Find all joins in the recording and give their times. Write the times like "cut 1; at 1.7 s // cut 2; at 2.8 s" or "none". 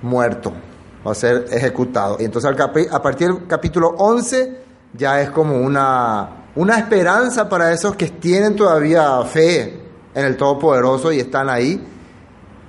cut 1; at 2.2 s // cut 2; at 6.5 s

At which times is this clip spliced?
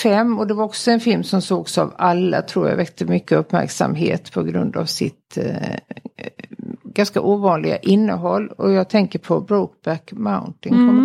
none

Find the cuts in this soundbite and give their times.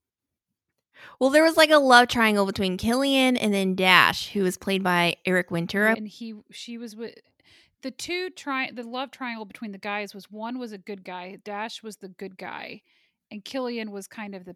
cut 1; at 5.9 s

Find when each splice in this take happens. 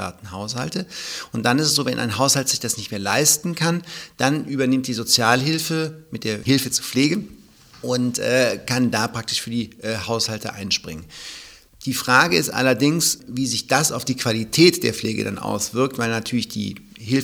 none

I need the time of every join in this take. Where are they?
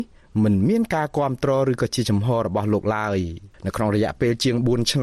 cut 1; at 3.5 s

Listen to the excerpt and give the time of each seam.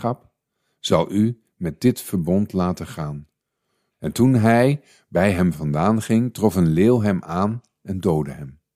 cut 1; at 3.9 s

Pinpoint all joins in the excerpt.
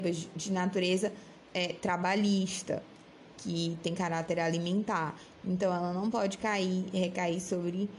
none

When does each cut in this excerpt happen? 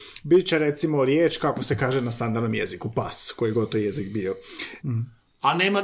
cut 1; at 4.8 s

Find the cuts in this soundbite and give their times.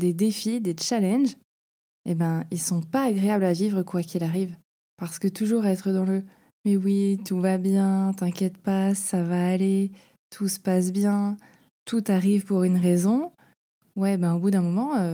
cut 1; at 4.8 s

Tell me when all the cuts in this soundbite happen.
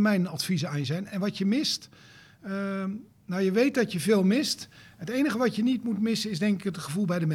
none

